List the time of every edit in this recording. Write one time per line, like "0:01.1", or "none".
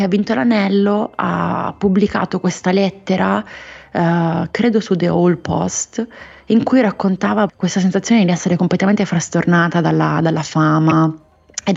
0:07.5